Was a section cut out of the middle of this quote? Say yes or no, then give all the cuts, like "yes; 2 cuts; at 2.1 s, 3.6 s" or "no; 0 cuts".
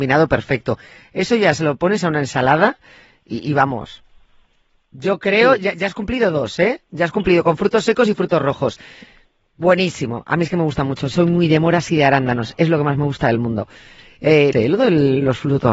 yes; 1 cut; at 14.5 s